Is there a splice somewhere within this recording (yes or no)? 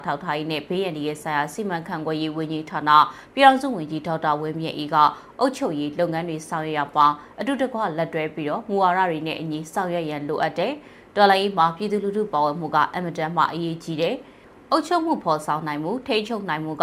no